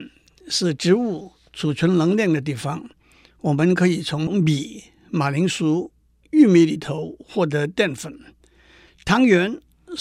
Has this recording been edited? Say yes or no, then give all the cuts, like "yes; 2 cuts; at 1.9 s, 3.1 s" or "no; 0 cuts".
no; 0 cuts